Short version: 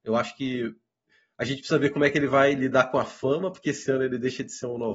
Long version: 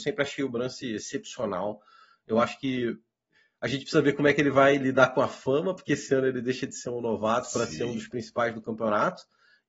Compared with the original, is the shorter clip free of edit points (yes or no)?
yes